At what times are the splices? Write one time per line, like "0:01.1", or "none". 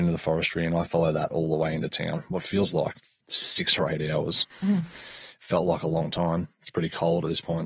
0:04.5